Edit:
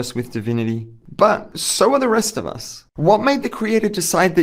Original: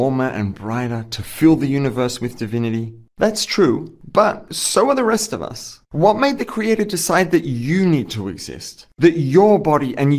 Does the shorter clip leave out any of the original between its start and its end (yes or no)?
yes